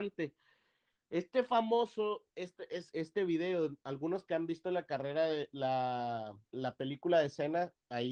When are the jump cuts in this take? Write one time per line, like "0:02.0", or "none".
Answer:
0:02.9
0:06.4